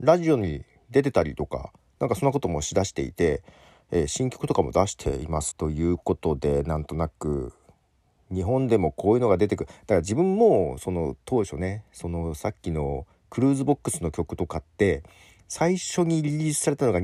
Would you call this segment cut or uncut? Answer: cut